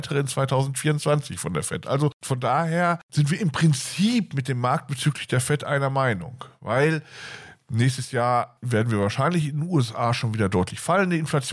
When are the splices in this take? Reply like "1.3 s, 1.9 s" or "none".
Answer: none